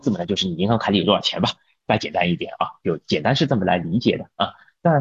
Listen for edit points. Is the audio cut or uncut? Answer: uncut